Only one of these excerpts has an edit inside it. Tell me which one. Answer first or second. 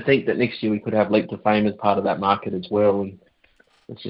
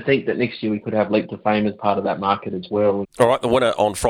second